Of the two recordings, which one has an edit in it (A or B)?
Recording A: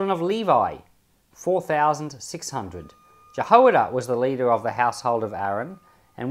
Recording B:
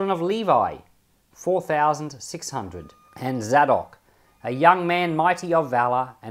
B